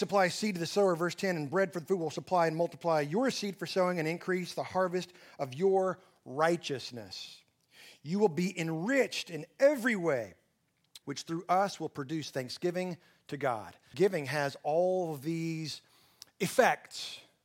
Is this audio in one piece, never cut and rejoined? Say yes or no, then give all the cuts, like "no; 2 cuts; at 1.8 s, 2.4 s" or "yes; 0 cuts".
no; 2 cuts; at 11.0 s, 13.9 s